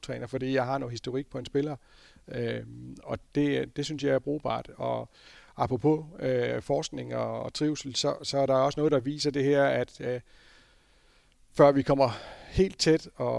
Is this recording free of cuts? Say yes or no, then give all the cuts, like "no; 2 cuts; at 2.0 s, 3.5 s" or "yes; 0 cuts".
yes; 0 cuts